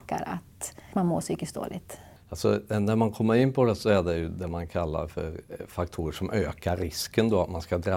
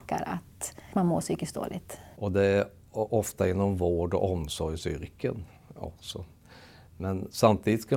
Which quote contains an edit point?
second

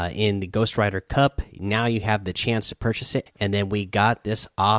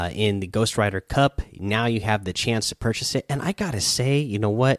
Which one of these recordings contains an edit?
first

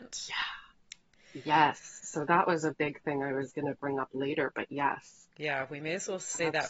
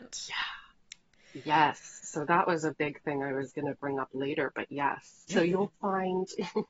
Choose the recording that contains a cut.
second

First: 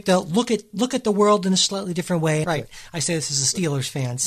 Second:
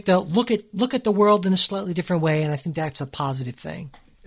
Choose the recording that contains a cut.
first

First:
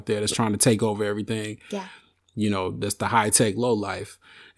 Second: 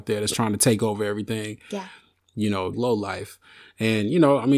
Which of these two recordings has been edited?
second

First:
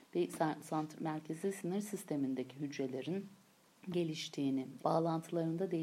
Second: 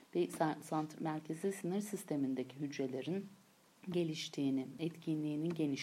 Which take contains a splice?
first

